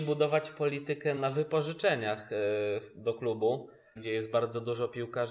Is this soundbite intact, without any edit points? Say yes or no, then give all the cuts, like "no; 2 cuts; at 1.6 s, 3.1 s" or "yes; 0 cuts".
no; 2 cuts; at 1.2 s, 4.0 s